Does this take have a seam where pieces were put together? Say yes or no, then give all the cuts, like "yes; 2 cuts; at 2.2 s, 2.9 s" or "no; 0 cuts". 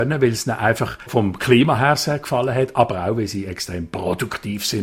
no; 0 cuts